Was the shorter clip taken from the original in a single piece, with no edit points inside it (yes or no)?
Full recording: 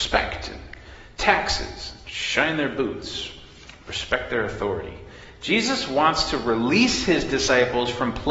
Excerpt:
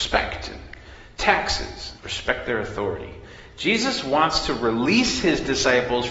no